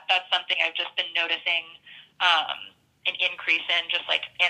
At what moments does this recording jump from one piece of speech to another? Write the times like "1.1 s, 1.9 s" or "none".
none